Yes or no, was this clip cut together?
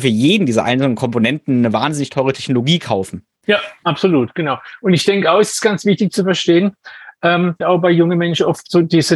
yes